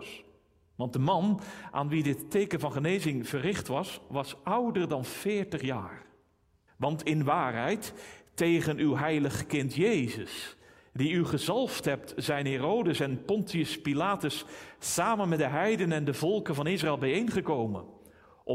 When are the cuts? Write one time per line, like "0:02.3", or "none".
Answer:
0:06.7

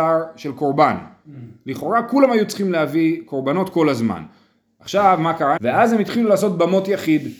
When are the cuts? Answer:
0:05.6

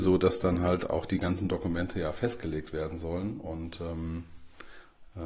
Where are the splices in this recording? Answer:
none

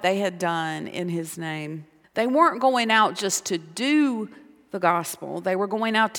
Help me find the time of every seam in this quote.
0:02.0

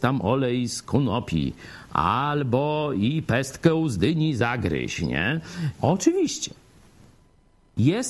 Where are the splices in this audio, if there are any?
0:05.7

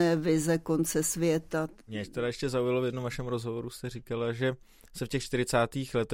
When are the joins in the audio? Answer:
none

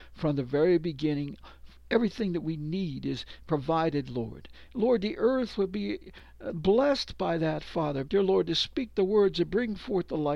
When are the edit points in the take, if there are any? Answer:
0:04.7
0:08.0

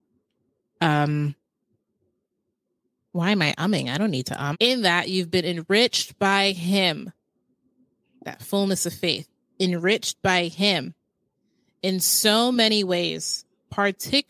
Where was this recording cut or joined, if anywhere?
0:04.5

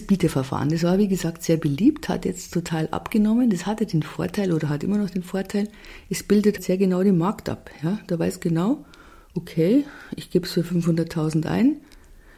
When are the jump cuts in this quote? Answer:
0:06.6

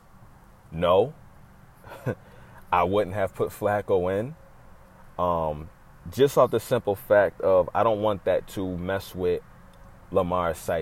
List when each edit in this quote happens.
none

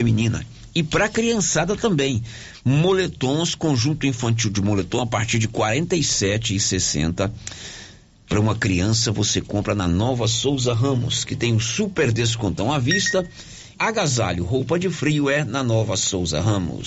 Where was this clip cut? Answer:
0:13.8

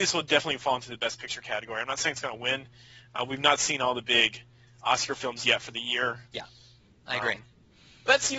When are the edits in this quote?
0:06.3

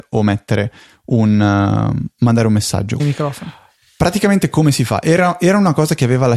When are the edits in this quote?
0:03.0

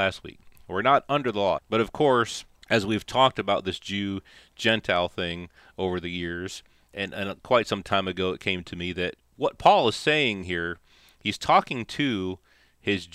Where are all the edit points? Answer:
0:01.6

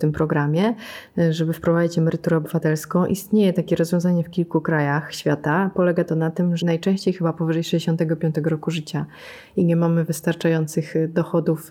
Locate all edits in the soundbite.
0:06.6

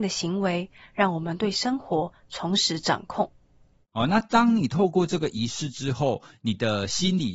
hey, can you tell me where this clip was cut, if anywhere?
0:03.9

